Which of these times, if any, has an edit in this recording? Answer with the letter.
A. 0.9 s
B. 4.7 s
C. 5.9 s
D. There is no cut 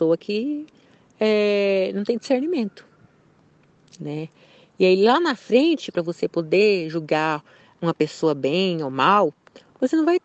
C